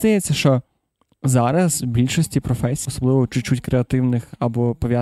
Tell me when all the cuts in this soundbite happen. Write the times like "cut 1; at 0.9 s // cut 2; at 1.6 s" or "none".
cut 1; at 2.8 s